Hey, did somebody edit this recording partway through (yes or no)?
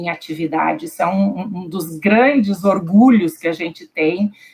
no